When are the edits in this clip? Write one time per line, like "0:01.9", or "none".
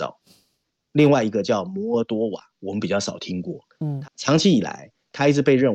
0:04.0